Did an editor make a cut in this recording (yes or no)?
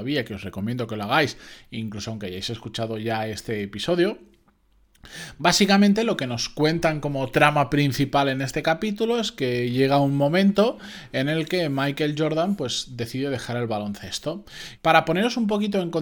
yes